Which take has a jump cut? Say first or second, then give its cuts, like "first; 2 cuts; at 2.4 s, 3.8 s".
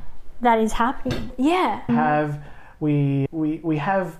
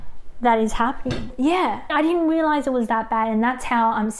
first; 1 cut; at 1.9 s